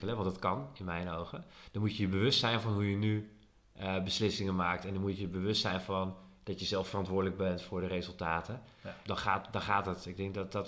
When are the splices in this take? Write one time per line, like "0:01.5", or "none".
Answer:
0:09.0